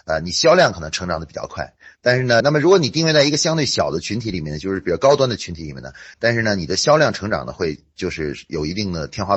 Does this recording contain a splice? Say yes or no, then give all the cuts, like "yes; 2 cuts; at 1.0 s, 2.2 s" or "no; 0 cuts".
yes; 2 cuts; at 2.4 s, 6.1 s